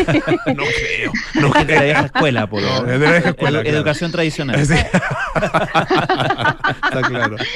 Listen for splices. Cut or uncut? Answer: uncut